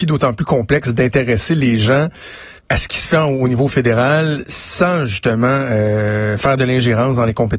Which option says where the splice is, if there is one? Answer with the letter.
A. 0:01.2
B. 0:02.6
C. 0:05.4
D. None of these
B